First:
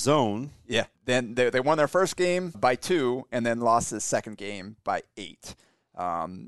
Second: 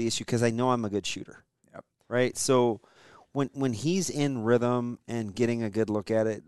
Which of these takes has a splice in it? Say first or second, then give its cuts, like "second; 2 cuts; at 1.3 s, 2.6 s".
first; 2 cuts; at 1.0 s, 2.5 s